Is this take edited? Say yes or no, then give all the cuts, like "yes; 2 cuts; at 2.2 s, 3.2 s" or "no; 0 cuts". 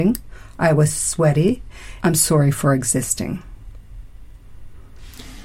yes; 1 cut; at 2.0 s